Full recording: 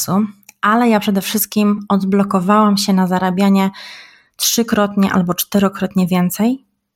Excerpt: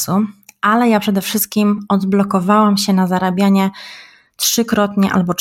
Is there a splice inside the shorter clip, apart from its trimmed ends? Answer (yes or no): no